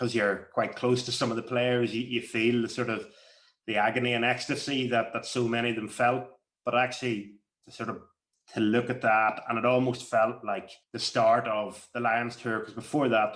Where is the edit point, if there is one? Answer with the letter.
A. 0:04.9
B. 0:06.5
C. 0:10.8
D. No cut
C